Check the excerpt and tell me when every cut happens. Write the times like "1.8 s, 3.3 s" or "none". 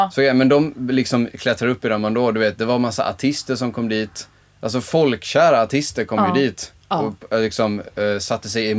none